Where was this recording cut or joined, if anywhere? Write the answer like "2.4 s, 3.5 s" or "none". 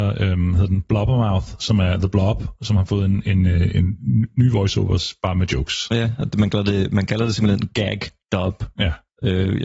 none